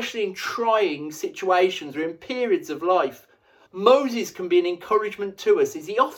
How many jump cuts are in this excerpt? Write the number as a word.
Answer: one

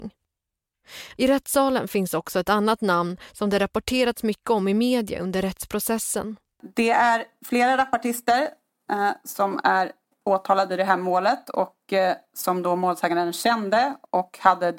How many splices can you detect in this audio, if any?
one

